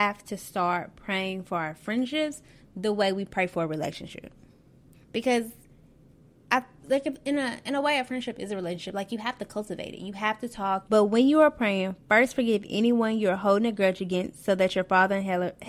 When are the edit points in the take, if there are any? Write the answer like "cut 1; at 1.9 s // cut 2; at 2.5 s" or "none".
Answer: cut 1; at 4.9 s // cut 2; at 10.8 s